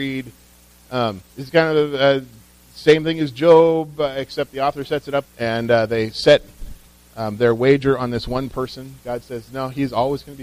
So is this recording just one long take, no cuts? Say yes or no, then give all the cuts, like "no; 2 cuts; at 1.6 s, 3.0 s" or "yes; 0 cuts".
no; 2 cuts; at 1.3 s, 5.3 s